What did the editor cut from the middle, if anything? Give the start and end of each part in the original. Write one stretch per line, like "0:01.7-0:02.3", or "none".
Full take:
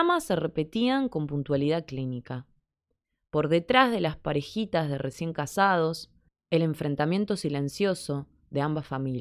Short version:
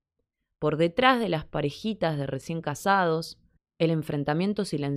none